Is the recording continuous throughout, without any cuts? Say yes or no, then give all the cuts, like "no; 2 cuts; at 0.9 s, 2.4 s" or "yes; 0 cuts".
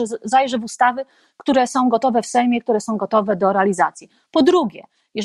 yes; 0 cuts